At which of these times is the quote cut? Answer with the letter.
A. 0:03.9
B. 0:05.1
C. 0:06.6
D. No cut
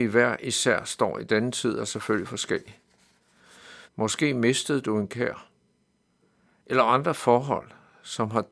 A